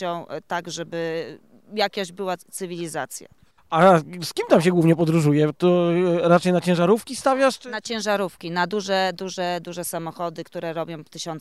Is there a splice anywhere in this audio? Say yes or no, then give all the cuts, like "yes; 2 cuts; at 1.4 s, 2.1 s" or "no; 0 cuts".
yes; 1 cut; at 3.6 s